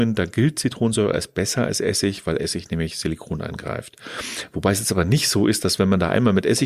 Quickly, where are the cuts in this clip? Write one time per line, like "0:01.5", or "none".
none